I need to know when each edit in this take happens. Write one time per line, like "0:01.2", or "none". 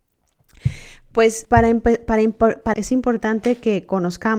0:01.4
0:02.7